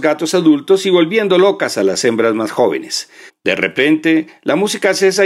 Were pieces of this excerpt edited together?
yes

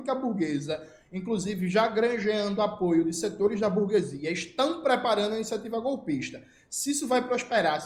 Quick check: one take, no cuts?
yes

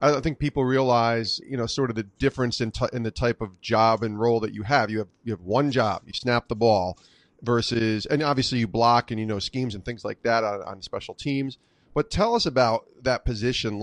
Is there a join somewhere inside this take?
yes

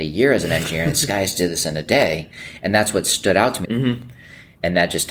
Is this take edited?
yes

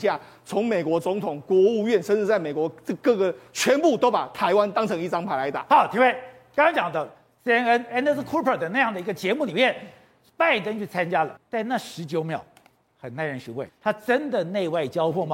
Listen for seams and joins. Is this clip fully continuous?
no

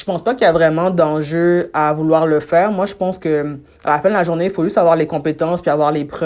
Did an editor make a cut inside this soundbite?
no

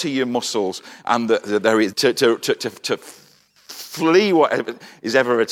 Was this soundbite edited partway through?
yes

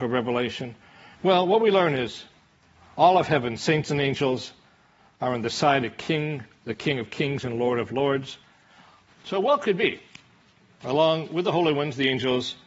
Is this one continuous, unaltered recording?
no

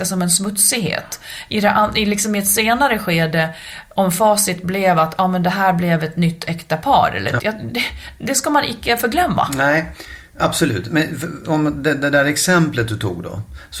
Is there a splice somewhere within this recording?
yes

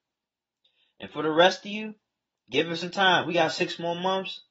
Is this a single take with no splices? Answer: yes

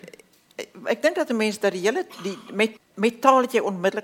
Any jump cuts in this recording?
yes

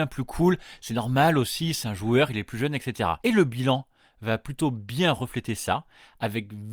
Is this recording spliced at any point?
yes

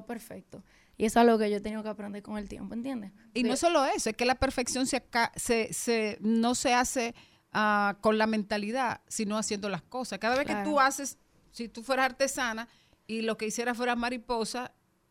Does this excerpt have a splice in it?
no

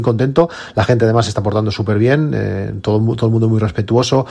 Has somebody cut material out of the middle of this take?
no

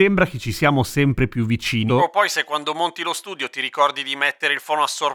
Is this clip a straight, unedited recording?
no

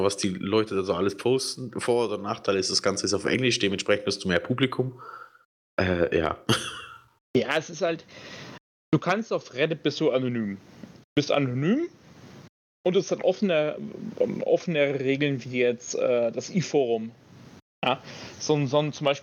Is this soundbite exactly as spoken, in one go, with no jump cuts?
yes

